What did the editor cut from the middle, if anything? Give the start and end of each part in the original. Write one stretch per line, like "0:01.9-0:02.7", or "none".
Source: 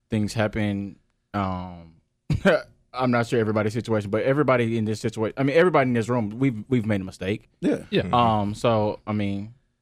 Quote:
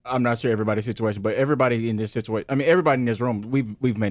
none